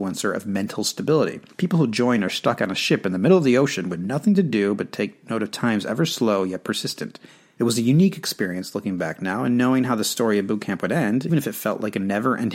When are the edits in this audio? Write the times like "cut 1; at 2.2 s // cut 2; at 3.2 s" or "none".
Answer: cut 1; at 1.5 s // cut 2; at 7.6 s // cut 3; at 11.3 s